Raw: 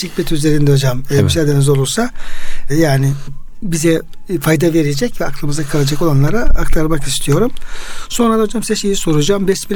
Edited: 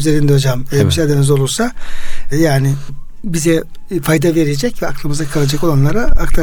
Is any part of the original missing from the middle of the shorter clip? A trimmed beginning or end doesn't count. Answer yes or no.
no